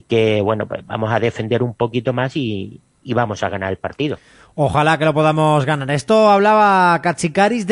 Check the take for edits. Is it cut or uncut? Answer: uncut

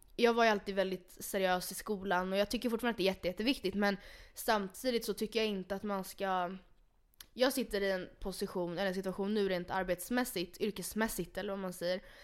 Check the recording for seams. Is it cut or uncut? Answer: uncut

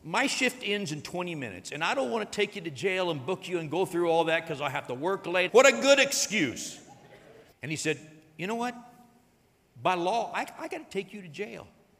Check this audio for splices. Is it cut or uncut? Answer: cut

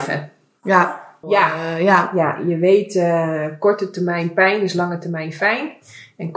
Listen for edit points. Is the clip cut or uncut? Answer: cut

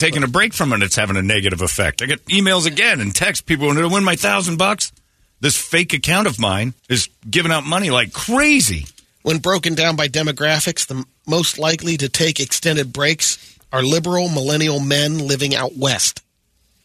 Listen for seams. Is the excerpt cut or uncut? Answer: cut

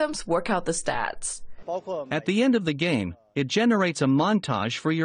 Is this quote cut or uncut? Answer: uncut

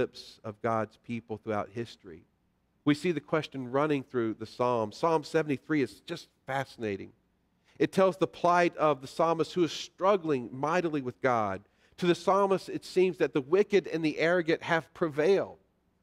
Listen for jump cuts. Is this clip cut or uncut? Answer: cut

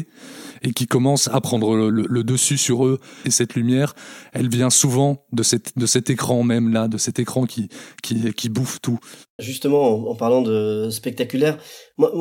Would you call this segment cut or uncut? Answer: cut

